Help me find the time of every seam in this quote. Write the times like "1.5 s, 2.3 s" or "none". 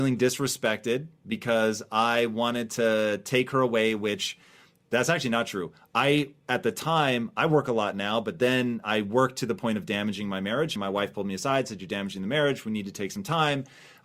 none